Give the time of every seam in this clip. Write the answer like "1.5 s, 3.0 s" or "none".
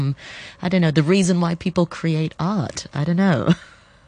none